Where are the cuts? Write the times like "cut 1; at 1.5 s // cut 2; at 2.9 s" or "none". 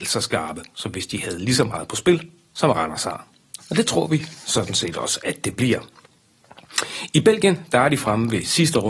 cut 1; at 3.6 s